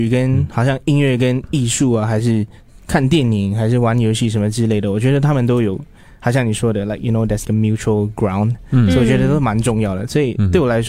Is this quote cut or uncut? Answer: cut